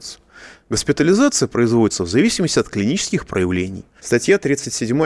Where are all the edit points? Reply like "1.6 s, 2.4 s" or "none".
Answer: 4.0 s